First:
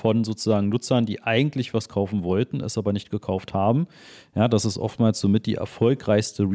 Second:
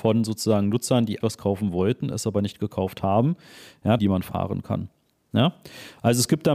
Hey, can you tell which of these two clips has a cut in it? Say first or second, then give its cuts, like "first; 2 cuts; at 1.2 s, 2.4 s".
second; 2 cuts; at 1.2 s, 4.0 s